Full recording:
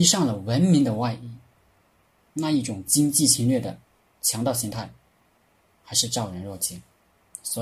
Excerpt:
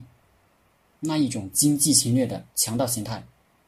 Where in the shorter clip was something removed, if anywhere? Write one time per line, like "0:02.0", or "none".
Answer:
0:02.5

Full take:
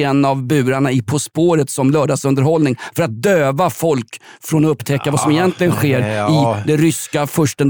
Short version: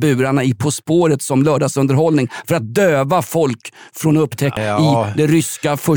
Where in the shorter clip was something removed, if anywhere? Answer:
0:04.6

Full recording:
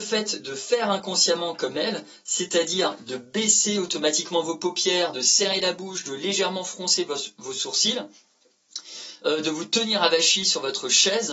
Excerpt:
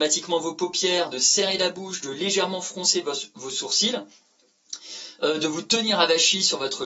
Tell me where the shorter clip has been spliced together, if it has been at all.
none

